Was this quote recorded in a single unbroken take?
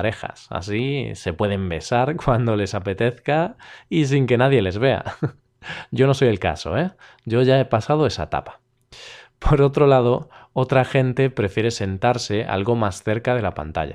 yes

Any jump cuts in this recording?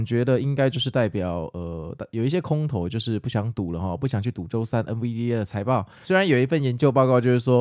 yes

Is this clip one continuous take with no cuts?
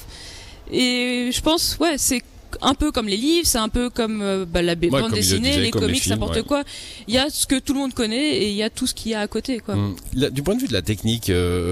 yes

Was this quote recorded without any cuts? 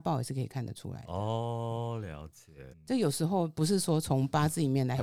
no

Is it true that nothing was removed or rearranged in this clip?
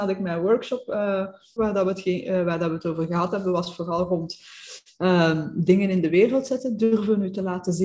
no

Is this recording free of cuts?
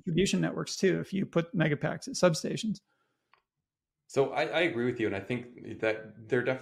yes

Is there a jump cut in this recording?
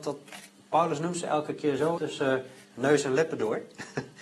yes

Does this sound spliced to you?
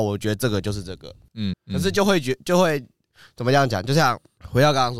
yes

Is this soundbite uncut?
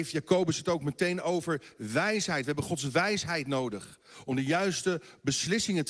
yes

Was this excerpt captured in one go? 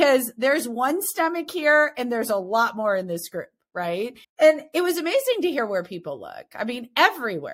no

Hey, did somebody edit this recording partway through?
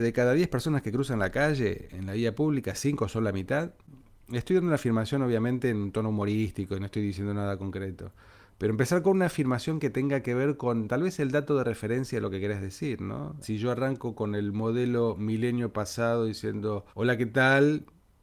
yes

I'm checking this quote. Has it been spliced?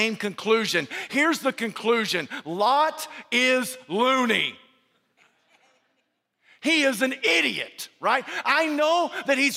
no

